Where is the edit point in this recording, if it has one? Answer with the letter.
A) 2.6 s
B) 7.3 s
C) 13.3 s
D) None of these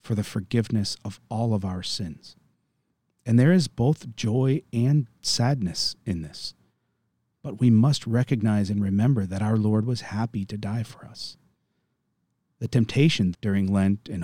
C